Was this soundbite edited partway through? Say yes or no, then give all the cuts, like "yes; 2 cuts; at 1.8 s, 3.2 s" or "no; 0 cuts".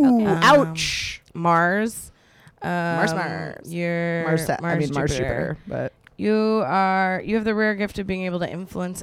no; 0 cuts